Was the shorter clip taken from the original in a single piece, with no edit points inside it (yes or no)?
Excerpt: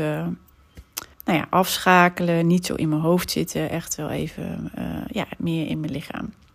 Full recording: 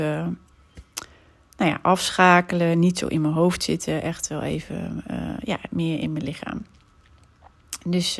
no